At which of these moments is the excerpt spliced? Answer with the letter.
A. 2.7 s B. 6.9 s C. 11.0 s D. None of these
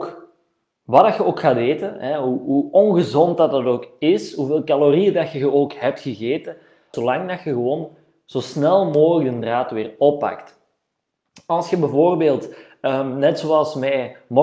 B